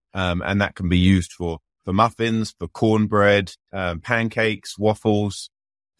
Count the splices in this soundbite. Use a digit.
1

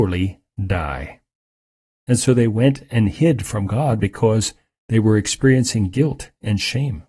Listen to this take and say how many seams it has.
1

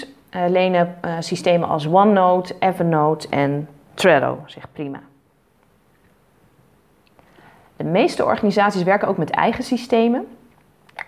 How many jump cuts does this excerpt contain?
0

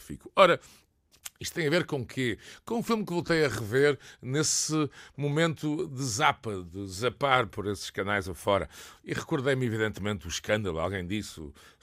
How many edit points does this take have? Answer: 0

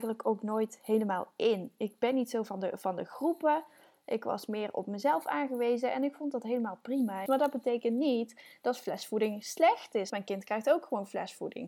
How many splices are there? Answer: 2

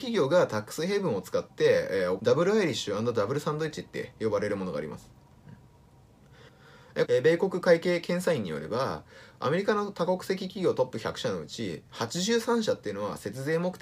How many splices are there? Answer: 2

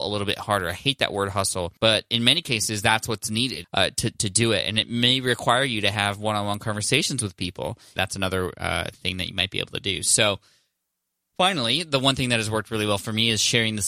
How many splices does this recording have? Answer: 3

